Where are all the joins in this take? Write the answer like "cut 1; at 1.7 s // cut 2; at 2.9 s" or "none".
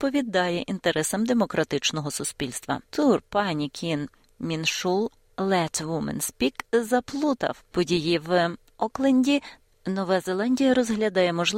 cut 1; at 2.9 s // cut 2; at 9.7 s